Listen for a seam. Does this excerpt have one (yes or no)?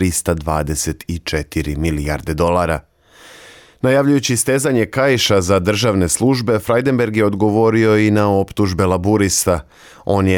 no